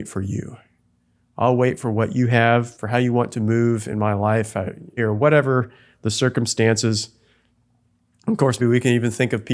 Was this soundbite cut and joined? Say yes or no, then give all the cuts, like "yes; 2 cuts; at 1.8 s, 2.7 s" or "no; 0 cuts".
yes; 3 cuts; at 2.7 s, 5.0 s, 8.6 s